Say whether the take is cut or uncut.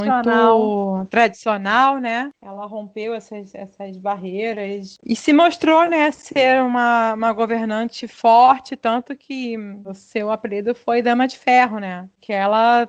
uncut